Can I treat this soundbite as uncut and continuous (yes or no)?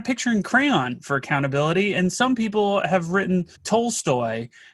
no